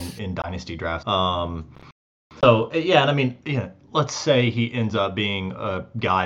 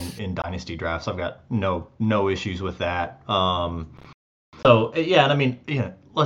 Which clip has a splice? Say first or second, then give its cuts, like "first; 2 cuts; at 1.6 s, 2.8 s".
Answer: first; 1 cut; at 1.0 s